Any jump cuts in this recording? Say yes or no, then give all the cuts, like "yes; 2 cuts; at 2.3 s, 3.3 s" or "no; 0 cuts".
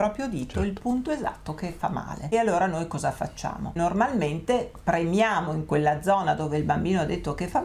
no; 0 cuts